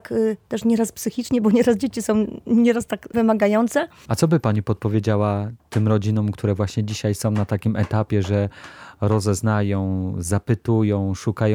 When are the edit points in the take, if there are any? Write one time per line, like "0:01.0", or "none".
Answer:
0:04.1